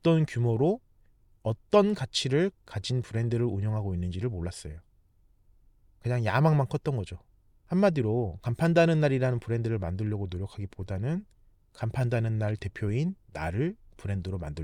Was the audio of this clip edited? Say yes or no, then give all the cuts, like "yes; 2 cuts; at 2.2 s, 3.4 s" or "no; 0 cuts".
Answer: yes; 1 cut; at 7.5 s